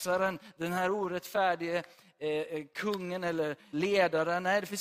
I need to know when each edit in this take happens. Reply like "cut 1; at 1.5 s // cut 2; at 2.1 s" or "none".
cut 1; at 3.7 s